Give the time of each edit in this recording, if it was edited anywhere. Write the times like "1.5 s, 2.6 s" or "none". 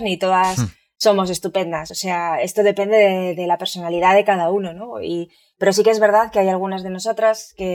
none